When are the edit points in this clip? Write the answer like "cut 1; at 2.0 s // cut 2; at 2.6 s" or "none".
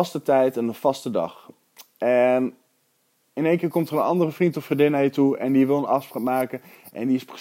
none

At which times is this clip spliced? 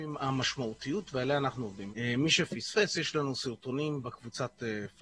cut 1; at 1.9 s

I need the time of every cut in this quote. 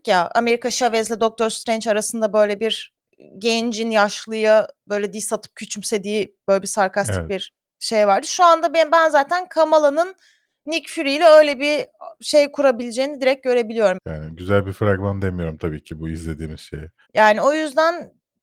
cut 1; at 14.0 s // cut 2; at 17.1 s

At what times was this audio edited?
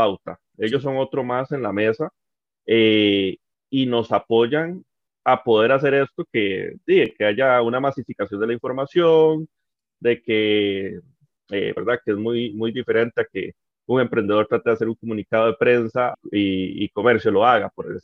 cut 1; at 11.8 s // cut 2; at 16.1 s

